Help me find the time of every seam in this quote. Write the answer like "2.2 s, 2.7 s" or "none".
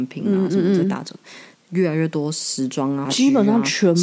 1.6 s, 3.0 s